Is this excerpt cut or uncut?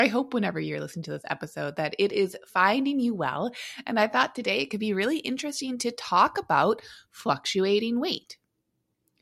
uncut